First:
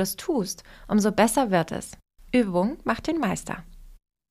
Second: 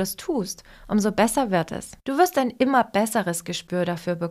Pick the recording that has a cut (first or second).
second